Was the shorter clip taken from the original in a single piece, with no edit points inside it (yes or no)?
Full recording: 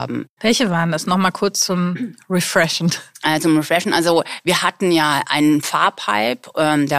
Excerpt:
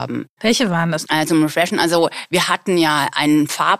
no